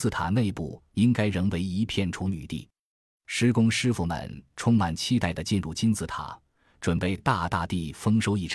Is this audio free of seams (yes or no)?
yes